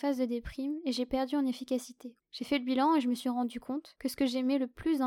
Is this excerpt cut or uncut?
cut